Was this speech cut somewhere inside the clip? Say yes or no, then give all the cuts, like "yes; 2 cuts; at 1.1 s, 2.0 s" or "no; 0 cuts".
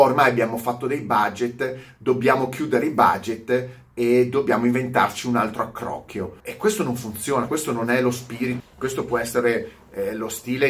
yes; 3 cuts; at 6.4 s, 7.5 s, 8.6 s